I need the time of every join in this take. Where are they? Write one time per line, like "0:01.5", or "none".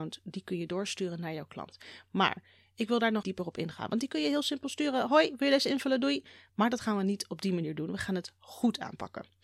0:03.2